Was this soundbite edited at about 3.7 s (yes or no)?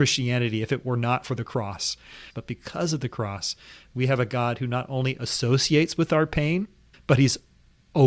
no